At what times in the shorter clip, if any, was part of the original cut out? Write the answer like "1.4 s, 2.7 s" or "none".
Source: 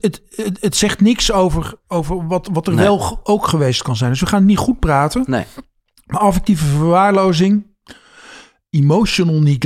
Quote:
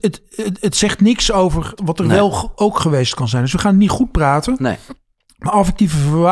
1.8 s